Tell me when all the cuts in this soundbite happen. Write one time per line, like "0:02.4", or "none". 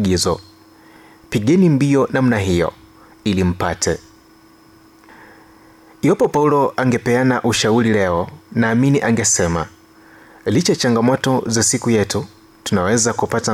none